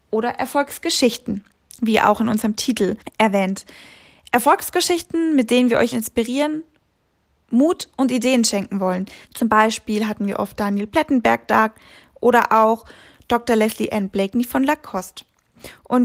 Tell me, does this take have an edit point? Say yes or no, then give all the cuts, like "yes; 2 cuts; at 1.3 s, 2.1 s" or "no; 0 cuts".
yes; 2 cuts; at 5.9 s, 9.2 s